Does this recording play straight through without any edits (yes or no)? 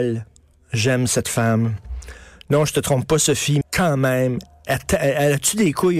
no